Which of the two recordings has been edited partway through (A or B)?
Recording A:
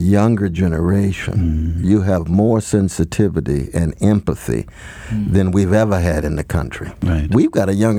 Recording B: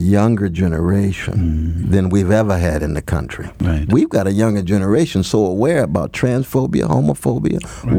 B